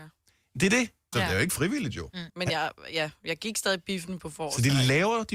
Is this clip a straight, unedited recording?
no; 2 cuts; at 1.1 s, 2.3 s

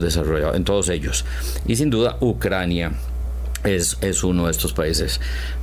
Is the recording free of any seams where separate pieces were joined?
yes; 0 cuts

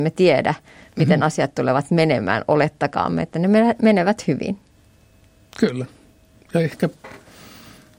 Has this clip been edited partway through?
no; 0 cuts

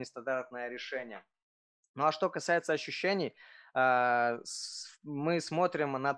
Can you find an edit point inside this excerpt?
no; 0 cuts

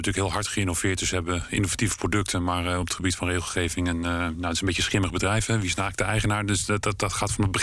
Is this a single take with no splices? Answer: yes; 0 cuts

